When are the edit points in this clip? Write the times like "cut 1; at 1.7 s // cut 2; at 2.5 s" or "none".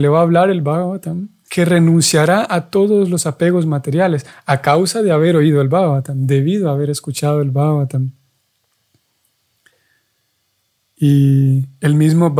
cut 1; at 1.5 s